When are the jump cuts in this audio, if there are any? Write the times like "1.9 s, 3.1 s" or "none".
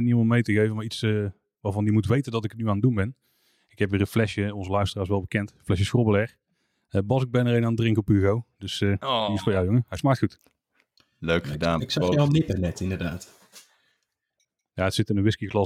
none

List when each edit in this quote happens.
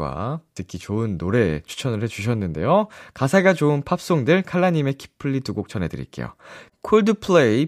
6.7 s

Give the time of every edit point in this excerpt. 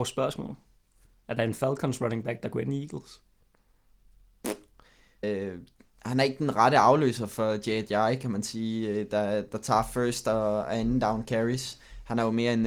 5.2 s

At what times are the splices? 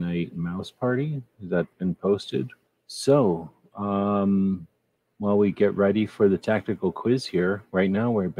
2.7 s

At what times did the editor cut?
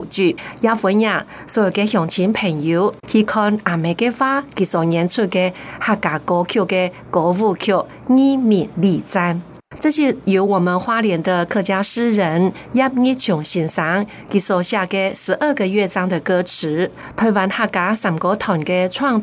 3.0 s

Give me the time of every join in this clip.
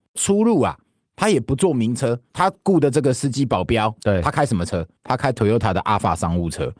5.0 s

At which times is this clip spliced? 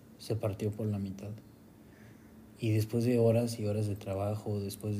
none

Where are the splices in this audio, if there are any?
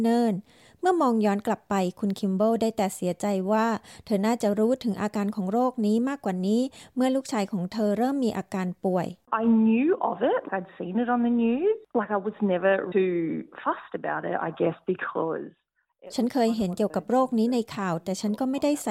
10.5 s, 12.9 s

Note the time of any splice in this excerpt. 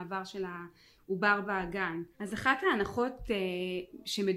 2.1 s

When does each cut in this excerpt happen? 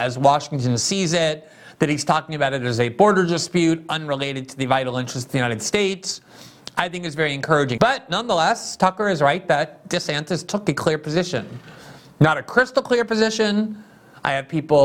7.8 s

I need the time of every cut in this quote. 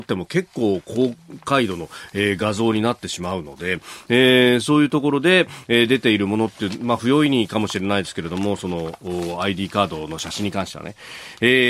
none

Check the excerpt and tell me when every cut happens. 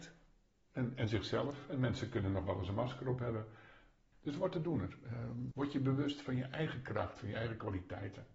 4.1 s, 5.5 s

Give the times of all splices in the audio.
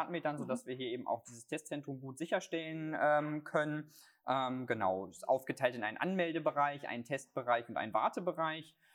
none

